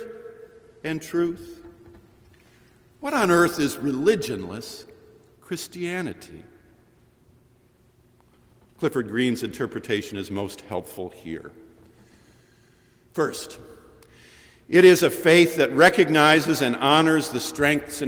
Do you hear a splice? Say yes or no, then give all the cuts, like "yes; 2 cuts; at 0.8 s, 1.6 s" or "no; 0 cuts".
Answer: no; 0 cuts